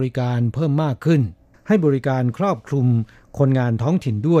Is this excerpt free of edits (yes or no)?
yes